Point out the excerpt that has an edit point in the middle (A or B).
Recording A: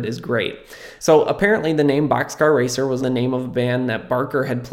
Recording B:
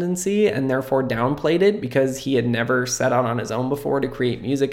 A